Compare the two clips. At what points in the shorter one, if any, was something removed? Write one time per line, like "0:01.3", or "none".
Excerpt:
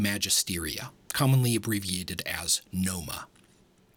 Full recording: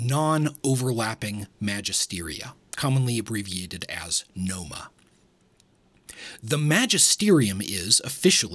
none